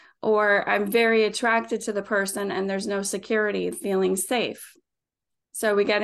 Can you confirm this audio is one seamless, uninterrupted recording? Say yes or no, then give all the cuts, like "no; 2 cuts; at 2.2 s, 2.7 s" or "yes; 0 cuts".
no; 1 cut; at 3.7 s